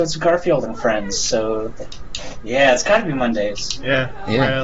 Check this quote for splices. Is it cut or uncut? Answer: uncut